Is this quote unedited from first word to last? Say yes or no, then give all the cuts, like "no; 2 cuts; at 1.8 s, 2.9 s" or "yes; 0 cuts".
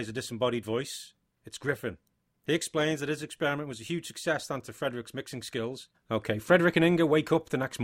no; 1 cut; at 5.9 s